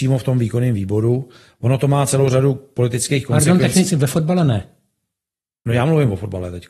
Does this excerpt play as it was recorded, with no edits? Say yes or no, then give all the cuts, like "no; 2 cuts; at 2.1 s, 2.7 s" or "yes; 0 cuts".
yes; 0 cuts